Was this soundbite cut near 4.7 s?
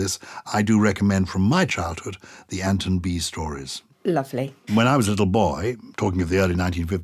yes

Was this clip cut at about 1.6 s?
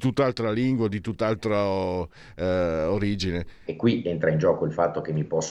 no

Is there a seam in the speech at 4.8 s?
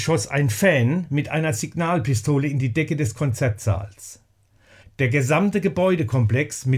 yes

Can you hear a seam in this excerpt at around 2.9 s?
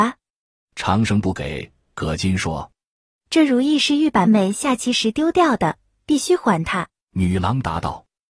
no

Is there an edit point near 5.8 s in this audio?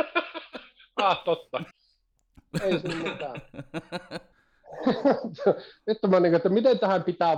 no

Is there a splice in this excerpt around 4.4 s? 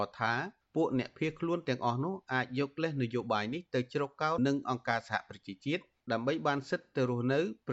yes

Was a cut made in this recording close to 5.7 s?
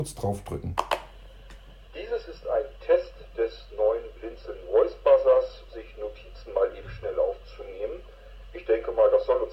yes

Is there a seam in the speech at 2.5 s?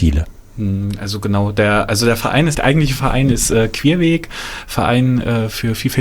yes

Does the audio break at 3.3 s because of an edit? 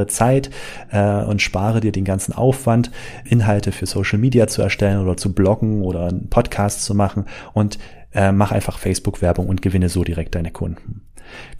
yes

